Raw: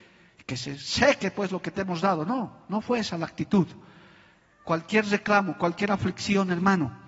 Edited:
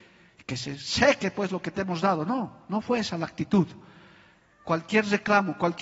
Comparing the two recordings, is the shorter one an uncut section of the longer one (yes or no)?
yes